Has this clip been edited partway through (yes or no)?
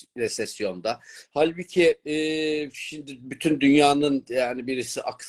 yes